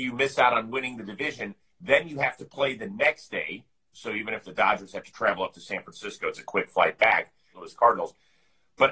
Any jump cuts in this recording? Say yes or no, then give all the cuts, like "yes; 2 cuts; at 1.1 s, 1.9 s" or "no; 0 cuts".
yes; 2 cuts; at 3.9 s, 7.5 s